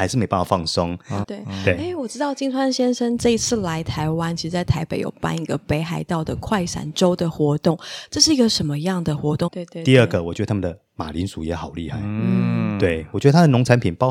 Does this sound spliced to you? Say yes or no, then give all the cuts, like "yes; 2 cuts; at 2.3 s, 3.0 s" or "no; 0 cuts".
yes; 2 cuts; at 1.2 s, 9.5 s